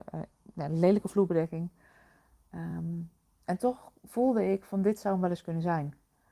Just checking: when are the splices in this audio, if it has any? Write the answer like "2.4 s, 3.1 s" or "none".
none